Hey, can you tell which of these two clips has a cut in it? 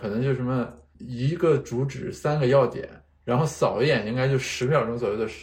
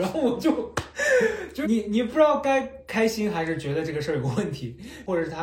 second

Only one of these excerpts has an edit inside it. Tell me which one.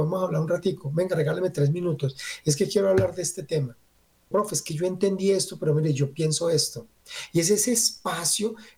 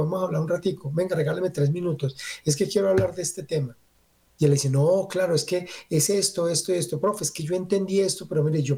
first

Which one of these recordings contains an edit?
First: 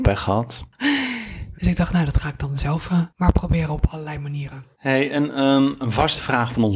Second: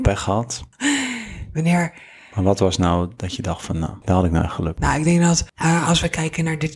first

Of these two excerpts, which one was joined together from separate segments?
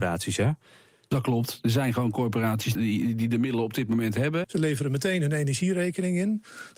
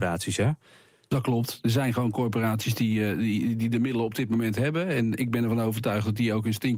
first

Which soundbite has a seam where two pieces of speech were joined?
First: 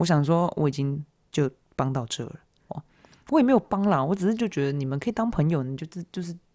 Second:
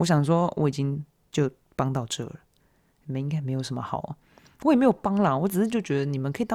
first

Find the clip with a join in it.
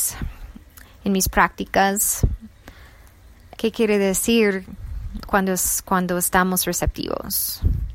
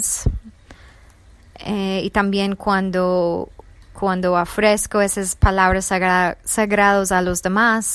first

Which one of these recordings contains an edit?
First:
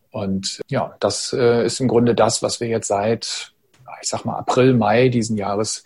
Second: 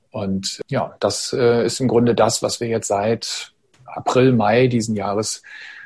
second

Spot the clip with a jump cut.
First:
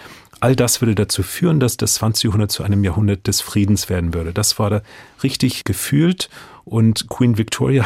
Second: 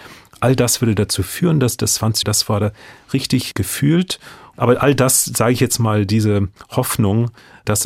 second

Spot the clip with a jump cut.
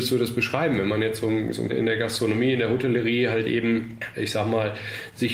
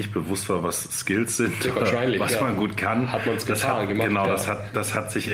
first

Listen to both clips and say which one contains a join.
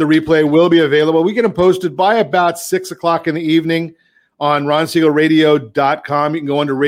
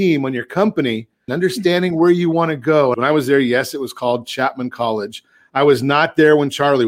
second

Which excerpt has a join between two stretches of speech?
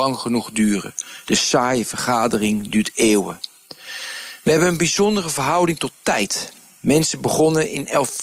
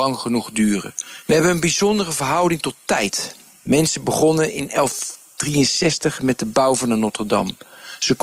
second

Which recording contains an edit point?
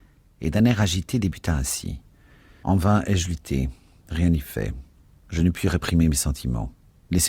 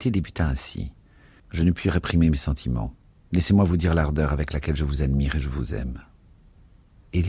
second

